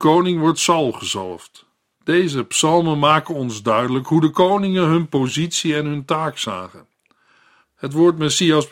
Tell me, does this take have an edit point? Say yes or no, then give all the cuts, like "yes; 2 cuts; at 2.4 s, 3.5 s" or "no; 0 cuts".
yes; 2 cuts; at 1.9 s, 7.6 s